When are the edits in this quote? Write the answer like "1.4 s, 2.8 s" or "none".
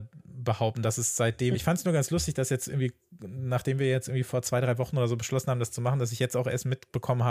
1.5 s